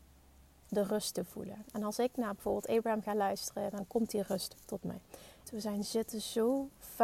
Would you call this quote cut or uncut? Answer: cut